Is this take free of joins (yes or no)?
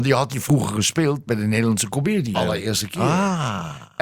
no